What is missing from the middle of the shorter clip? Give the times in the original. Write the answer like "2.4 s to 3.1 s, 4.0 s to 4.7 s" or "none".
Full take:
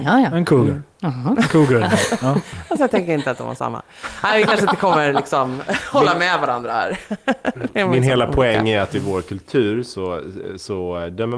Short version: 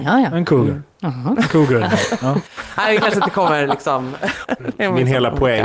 2.5 s to 3.9 s, 5.9 s to 7.4 s